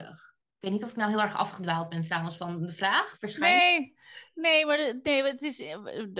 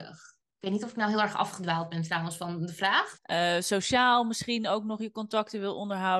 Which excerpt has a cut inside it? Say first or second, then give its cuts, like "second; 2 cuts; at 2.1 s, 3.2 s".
second; 1 cut; at 3.2 s